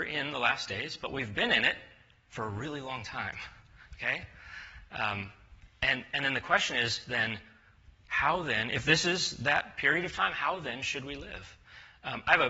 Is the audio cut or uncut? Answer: uncut